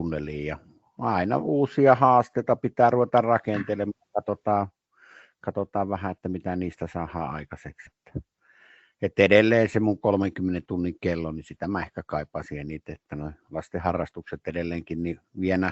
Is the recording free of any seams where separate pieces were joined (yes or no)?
no